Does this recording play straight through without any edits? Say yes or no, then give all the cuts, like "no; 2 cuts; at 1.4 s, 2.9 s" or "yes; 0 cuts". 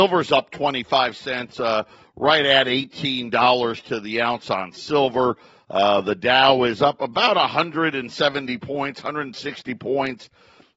yes; 0 cuts